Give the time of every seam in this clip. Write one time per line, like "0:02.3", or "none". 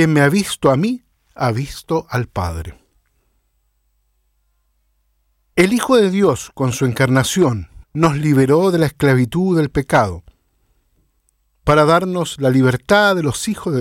0:07.8